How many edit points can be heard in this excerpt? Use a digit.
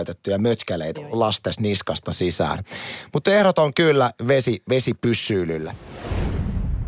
1